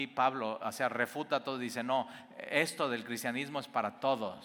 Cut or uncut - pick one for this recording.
uncut